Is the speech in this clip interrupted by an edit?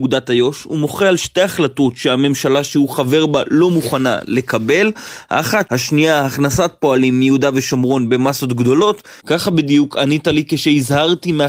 yes; 2 cuts; at 5.7 s, 9.2 s

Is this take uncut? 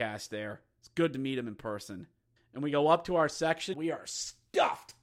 no; 2 cuts; at 2.4 s, 3.7 s

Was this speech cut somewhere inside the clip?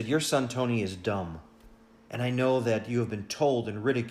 yes; 1 cut; at 2.1 s

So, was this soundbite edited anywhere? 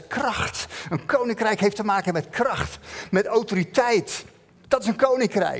no; 0 cuts

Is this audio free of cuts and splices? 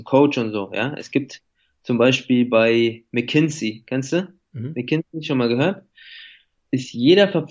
yes; 0 cuts

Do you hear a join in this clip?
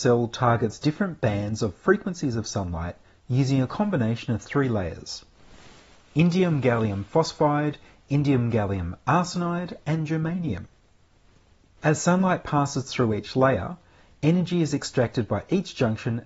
no; 0 cuts

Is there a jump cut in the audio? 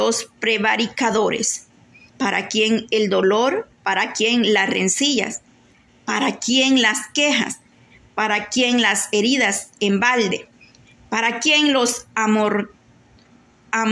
yes; 1 cut; at 2.1 s

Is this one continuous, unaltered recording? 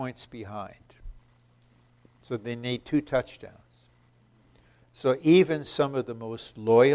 yes; 0 cuts

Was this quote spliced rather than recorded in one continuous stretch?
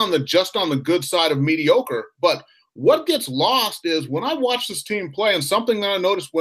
no; 0 cuts

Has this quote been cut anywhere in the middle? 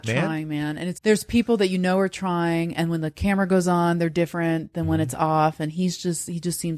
yes; 1 cut; at 1.0 s

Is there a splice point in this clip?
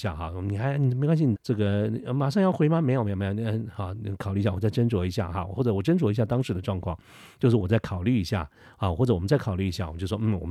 yes; 1 cut; at 1.4 s

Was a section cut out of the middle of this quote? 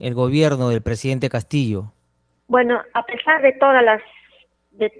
no; 0 cuts

